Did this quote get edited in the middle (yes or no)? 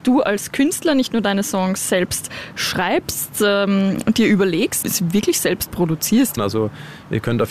yes